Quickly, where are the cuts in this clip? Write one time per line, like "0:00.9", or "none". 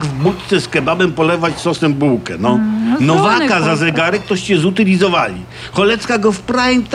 none